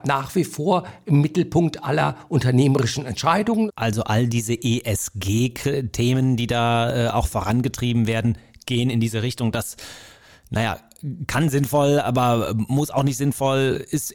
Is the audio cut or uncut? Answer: cut